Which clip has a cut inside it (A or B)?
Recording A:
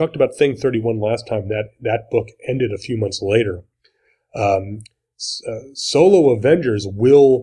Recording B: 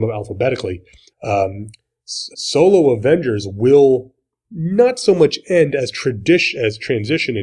B